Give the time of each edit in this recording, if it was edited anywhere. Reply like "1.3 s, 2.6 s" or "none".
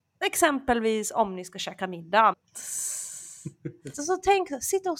2.3 s, 3.9 s

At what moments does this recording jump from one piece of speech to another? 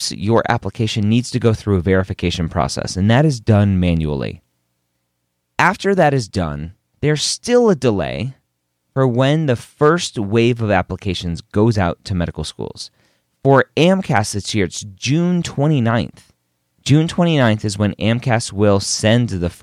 none

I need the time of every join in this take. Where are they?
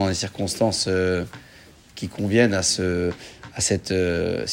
none

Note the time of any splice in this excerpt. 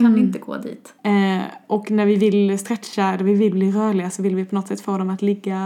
1.0 s

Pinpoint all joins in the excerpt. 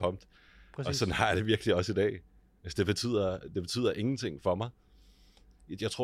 none

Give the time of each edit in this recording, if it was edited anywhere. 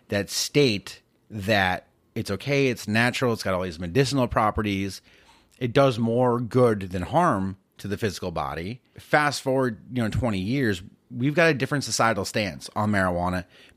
8.9 s

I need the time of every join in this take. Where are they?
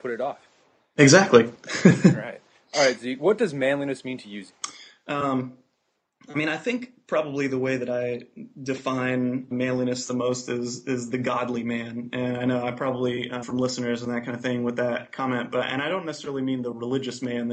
9.5 s, 13.4 s

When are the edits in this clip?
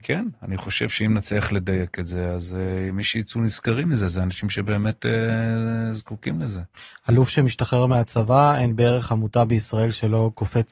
none

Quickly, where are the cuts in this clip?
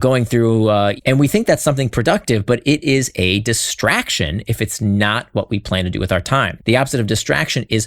1.0 s, 6.6 s

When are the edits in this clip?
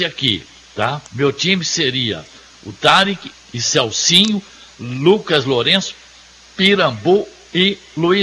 1.1 s, 3.3 s

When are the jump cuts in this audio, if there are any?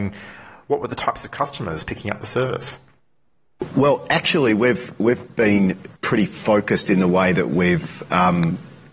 6.0 s

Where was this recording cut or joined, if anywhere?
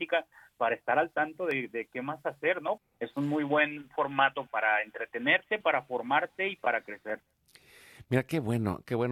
2.8 s, 4.5 s

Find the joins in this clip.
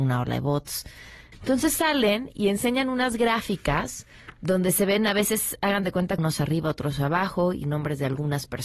1.3 s, 6.2 s

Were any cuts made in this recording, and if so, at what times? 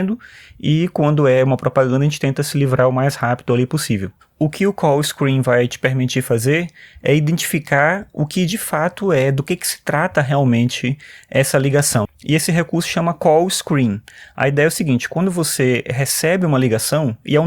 12.1 s

